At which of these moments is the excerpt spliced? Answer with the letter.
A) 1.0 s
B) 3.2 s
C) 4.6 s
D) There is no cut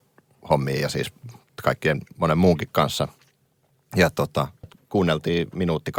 C